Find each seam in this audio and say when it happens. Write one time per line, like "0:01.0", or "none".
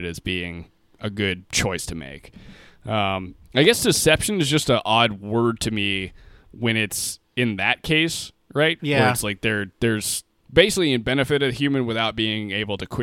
0:08.8
0:10.4